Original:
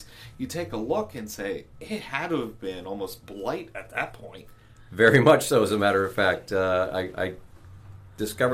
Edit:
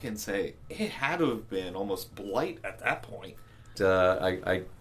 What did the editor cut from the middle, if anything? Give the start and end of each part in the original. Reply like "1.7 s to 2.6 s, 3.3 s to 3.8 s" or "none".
4.9 s to 6.5 s